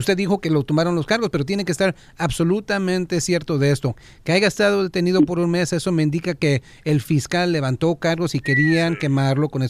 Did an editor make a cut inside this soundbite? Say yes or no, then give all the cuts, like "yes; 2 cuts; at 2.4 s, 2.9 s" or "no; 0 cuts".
no; 0 cuts